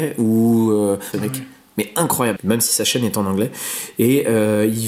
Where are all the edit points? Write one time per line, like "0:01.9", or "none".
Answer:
0:01.1
0:02.4

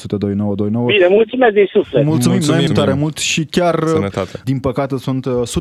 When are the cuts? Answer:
0:02.7
0:04.4

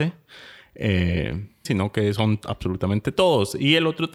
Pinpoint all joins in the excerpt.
0:01.6

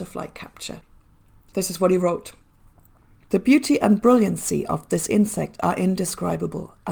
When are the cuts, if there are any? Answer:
none

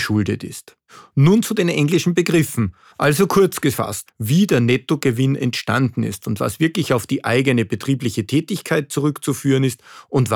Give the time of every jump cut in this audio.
0:02.9
0:04.1

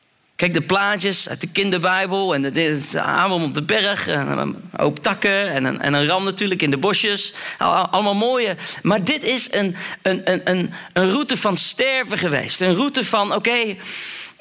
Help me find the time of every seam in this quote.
none

